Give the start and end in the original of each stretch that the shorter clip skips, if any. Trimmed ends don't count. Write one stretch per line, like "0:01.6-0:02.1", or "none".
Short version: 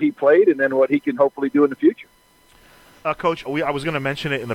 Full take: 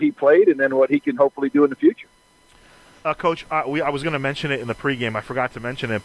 0:03.4-0:03.6